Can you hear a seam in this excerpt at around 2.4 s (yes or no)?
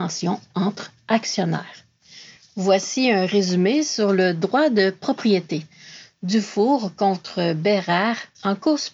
no